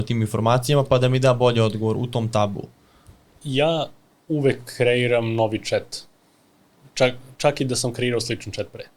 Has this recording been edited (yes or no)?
no